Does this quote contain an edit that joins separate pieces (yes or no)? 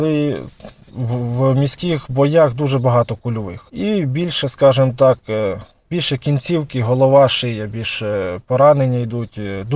no